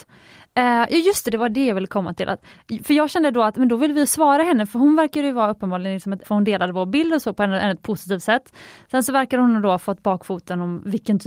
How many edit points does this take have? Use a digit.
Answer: 1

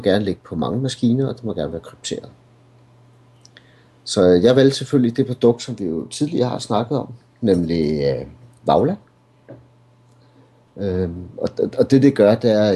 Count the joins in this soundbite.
0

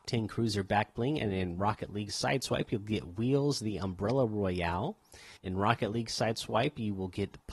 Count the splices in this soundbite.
1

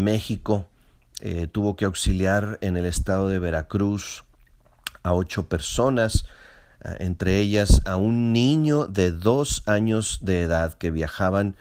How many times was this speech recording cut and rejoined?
0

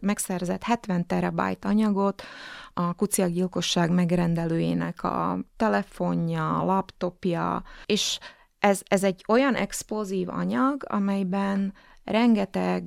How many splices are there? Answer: 0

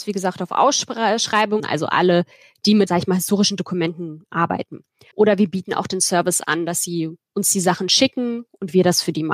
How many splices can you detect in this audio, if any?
3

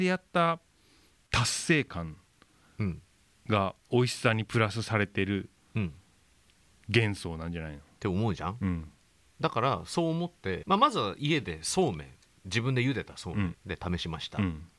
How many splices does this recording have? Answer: 3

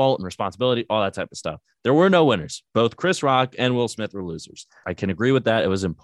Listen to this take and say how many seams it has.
1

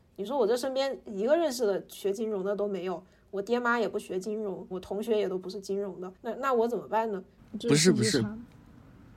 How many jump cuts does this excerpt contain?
3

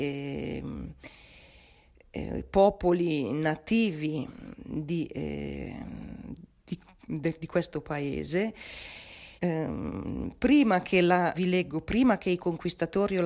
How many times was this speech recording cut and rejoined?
2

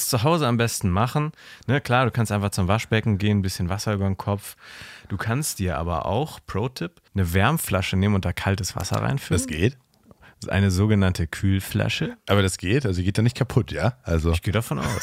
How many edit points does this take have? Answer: 1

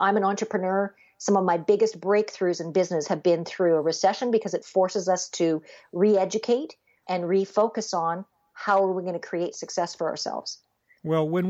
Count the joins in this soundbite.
1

